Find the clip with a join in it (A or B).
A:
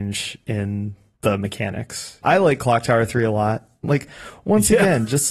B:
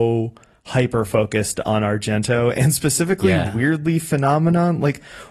A